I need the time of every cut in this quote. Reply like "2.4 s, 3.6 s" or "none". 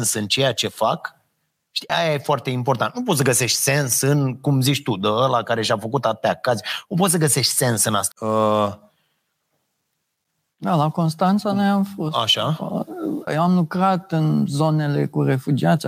1.9 s, 8.1 s, 13.3 s